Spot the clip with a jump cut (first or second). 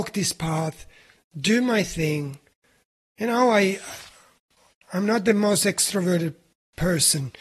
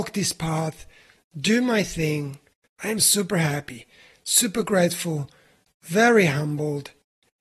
second